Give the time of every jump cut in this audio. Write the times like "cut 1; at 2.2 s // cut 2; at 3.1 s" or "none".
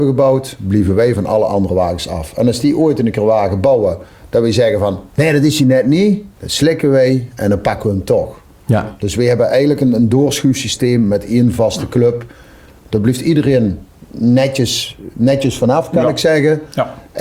cut 1; at 5.1 s // cut 2; at 6.3 s